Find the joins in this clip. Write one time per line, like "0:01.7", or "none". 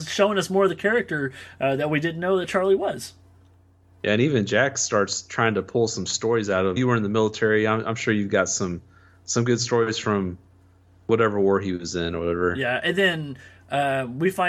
0:06.8